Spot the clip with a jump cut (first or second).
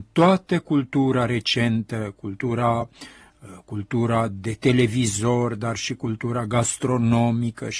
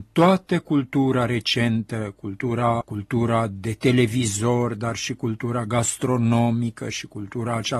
second